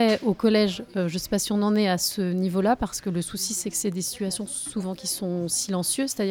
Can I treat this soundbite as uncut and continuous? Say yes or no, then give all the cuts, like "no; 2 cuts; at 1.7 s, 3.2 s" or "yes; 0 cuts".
yes; 0 cuts